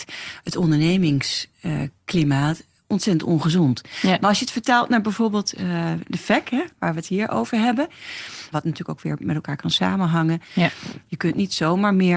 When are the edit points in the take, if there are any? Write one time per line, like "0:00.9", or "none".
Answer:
0:03.9
0:08.5
0:11.1